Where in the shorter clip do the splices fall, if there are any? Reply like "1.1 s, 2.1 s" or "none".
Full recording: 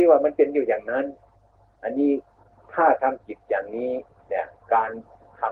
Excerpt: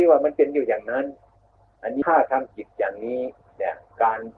2.0 s